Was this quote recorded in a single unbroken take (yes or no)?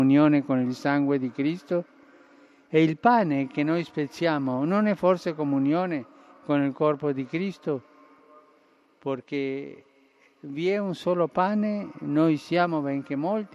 yes